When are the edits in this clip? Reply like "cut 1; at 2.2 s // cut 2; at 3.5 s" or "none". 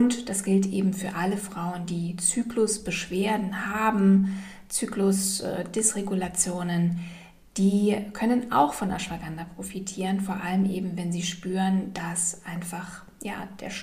none